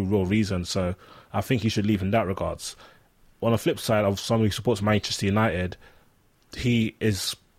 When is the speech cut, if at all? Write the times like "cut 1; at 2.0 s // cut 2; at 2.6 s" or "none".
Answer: none

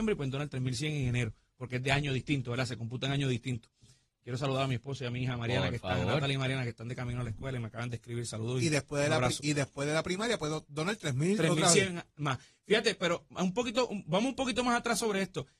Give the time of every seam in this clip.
none

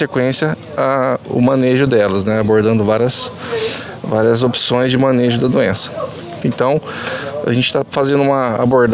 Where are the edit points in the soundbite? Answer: cut 1; at 6.4 s

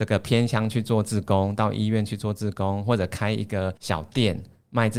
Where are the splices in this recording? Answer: cut 1; at 3.8 s

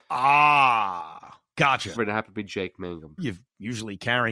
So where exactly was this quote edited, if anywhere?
cut 1; at 2.0 s // cut 2; at 3.2 s

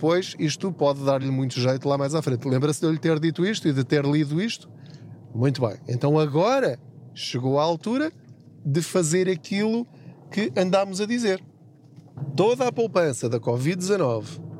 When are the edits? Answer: none

